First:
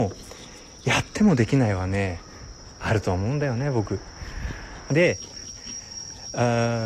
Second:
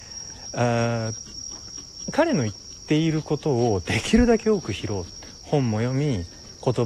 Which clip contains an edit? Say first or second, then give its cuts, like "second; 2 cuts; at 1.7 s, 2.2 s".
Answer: first; 1 cut; at 4.9 s